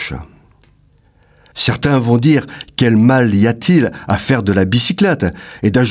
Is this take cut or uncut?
cut